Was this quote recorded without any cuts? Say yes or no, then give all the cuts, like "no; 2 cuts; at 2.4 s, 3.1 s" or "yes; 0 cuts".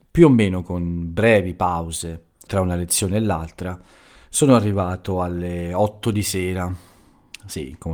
no; 1 cut; at 2.5 s